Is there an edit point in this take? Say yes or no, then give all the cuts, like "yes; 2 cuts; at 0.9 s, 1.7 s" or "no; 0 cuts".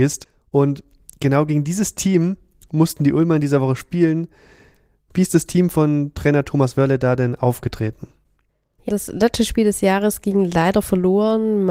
yes; 1 cut; at 8.9 s